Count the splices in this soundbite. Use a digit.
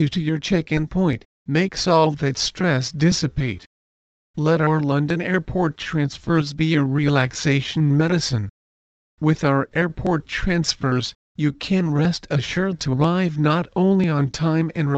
0